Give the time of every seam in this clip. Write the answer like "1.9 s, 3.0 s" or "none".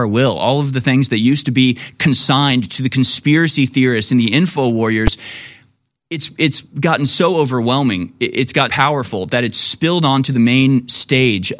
8.7 s